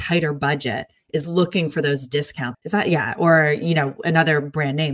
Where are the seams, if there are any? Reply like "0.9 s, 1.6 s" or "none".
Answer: 2.5 s